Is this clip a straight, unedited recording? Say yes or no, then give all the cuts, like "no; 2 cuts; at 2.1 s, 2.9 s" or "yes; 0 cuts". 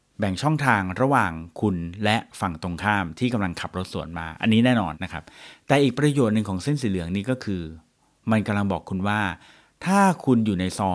no; 1 cut; at 4.9 s